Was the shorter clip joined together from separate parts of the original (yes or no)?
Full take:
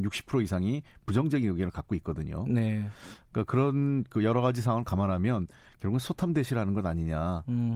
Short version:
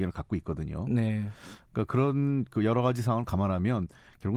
no